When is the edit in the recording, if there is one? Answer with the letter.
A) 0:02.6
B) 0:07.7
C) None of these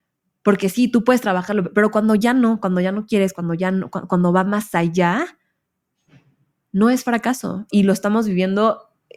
C